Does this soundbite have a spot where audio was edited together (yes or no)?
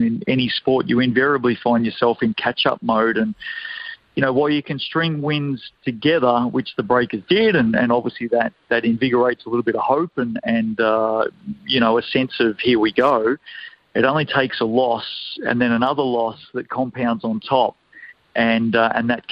no